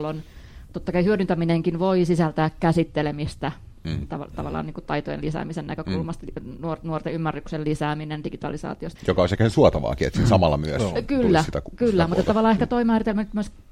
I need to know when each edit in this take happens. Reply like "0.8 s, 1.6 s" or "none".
9.0 s